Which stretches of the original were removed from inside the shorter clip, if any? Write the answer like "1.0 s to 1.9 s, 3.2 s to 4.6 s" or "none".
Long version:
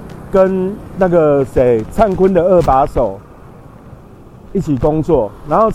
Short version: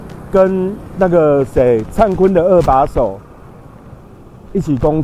none